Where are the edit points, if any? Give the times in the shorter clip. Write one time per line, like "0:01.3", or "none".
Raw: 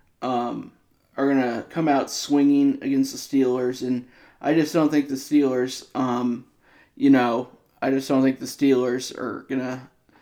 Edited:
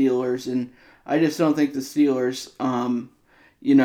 none